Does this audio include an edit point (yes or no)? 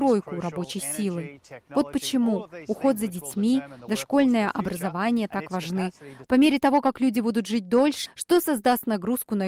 yes